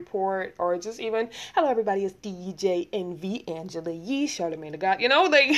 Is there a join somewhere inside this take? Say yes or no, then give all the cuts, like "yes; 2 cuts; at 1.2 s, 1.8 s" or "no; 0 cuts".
no; 0 cuts